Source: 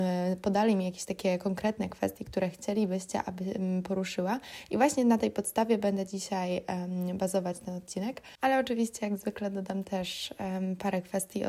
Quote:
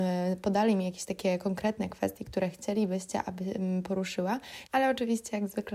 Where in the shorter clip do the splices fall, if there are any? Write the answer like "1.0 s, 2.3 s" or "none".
4.7 s

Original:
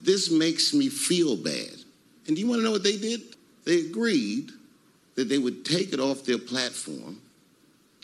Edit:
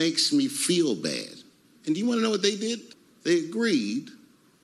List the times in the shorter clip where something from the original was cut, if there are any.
none

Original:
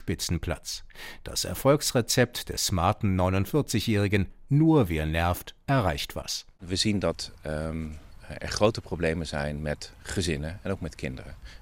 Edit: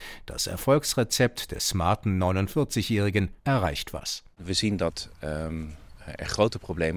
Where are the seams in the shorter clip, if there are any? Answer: 3.4 s

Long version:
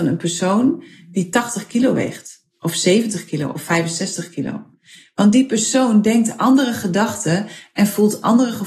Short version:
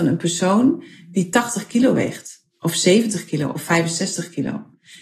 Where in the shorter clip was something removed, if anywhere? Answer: none

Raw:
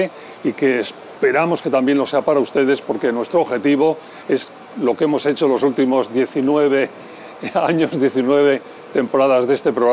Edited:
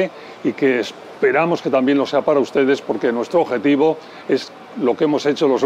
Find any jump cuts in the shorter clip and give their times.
none

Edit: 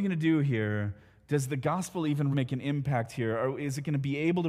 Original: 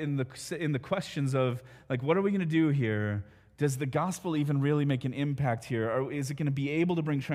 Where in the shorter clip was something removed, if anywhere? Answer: 2.3 s

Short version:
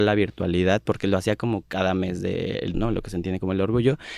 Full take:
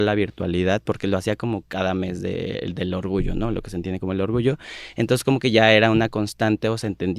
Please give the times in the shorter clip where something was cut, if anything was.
2.7 s

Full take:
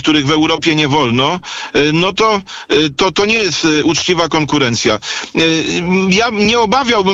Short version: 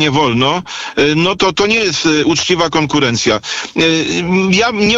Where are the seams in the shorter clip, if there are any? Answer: 1.4 s

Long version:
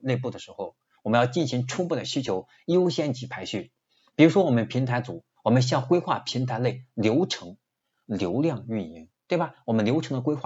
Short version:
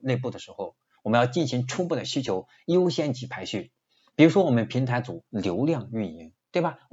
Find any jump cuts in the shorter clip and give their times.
5.3 s

